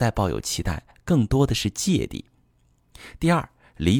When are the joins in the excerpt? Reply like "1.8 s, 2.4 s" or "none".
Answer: none

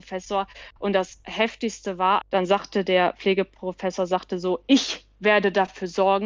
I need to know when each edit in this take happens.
2.2 s

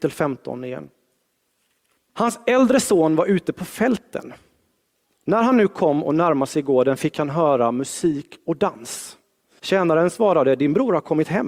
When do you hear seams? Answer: 2.1 s, 9.6 s

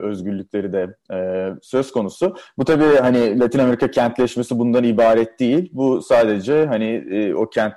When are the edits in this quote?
none

